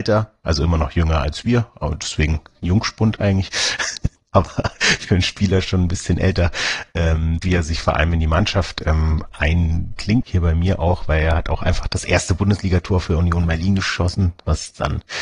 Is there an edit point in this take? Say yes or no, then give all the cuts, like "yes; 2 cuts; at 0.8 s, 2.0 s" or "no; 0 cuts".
yes; 2 cuts; at 7.4 s, 10.2 s